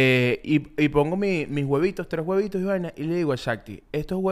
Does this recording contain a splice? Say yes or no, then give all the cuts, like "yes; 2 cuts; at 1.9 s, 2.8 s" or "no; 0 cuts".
no; 0 cuts